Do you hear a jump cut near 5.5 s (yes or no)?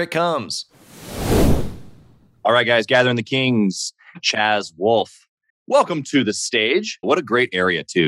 yes